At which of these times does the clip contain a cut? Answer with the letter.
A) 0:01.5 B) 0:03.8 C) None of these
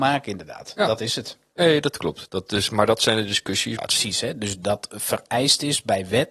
B